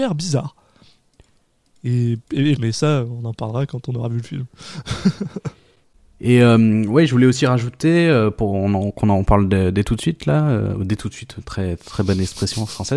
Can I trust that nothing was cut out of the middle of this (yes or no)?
no